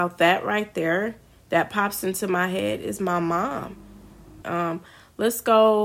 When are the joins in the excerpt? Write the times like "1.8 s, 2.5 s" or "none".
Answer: 4.4 s